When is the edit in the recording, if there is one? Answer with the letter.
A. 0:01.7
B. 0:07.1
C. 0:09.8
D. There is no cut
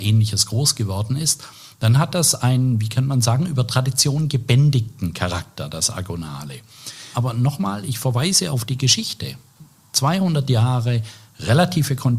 B